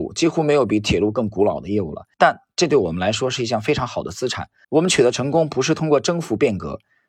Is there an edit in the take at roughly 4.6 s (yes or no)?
yes